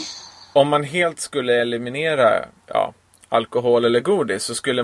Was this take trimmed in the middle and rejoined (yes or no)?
yes